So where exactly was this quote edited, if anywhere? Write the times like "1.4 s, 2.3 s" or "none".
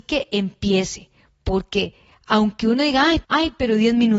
3.2 s